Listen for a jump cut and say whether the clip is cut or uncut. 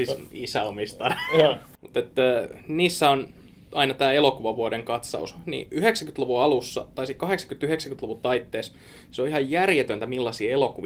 uncut